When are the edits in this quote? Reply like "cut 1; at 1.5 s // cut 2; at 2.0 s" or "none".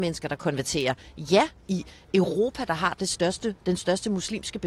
cut 1; at 1.6 s